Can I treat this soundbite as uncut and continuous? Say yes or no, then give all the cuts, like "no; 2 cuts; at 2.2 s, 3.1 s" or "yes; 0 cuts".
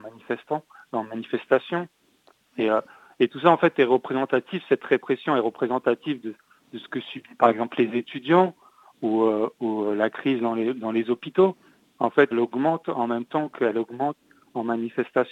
no; 1 cut; at 12.3 s